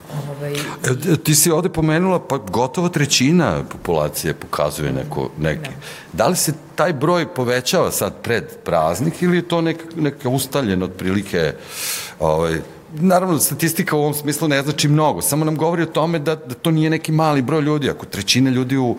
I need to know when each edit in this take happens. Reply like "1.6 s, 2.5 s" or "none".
none